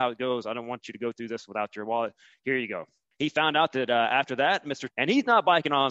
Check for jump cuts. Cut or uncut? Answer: cut